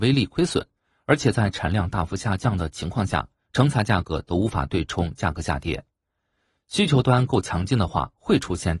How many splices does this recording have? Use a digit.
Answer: 0